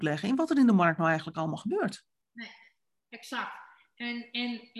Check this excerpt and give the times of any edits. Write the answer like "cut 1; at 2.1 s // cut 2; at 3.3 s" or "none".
cut 1; at 2.2 s